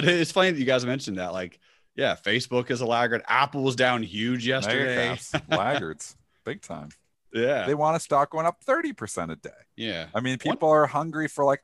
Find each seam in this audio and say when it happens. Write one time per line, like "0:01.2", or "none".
0:07.7